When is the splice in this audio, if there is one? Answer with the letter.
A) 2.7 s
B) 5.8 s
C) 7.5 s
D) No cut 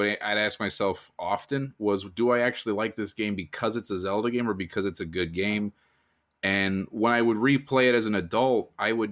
D